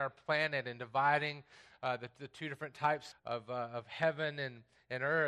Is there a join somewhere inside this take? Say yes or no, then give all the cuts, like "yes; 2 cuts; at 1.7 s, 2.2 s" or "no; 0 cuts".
yes; 1 cut; at 3.1 s